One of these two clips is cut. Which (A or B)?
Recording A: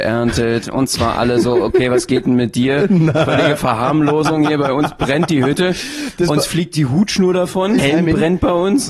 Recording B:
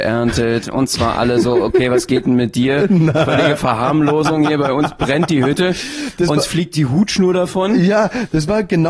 A